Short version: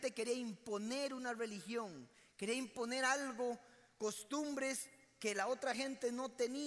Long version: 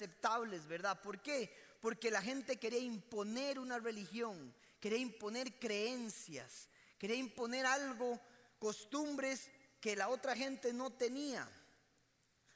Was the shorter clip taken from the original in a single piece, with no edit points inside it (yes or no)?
no